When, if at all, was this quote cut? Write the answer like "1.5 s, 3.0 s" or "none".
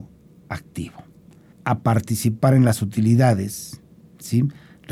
1.5 s